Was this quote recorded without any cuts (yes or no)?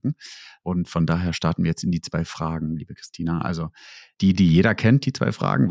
yes